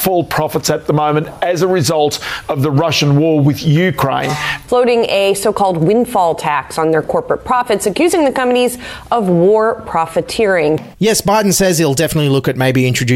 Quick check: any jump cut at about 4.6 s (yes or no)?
yes